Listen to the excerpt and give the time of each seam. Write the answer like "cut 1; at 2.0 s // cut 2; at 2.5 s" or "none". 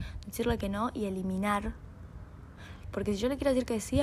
cut 1; at 2.8 s